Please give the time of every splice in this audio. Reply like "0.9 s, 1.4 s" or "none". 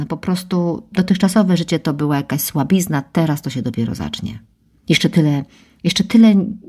4.8 s